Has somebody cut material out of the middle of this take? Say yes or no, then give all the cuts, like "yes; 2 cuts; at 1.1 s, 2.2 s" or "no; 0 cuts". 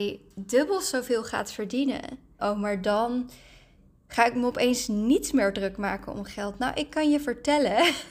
yes; 1 cut; at 2.4 s